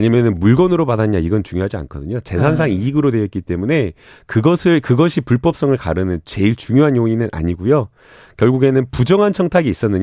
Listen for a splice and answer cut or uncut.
uncut